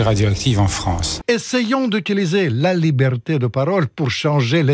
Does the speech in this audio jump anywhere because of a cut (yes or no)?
yes